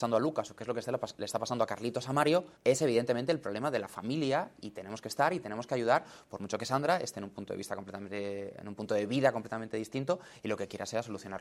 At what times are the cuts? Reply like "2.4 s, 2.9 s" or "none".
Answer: 2.6 s